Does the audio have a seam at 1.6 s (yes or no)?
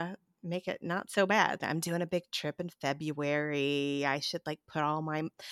yes